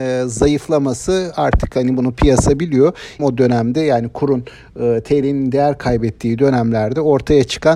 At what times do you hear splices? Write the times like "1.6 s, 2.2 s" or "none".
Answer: 3.2 s